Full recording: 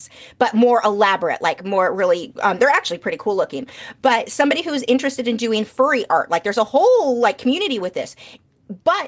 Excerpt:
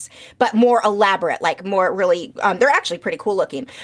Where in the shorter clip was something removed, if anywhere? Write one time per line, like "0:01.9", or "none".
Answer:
none